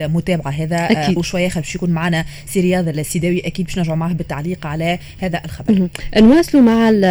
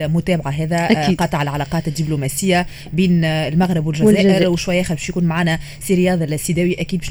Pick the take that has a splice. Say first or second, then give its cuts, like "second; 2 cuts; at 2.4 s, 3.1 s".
first; 1 cut; at 1.2 s